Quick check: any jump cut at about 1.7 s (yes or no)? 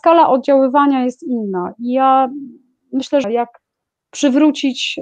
no